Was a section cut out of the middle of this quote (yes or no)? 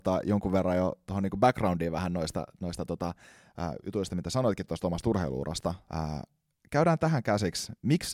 yes